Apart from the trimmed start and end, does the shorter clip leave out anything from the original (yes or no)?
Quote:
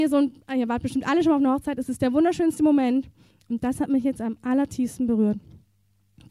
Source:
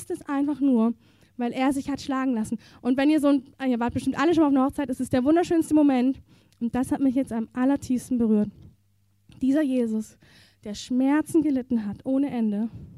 no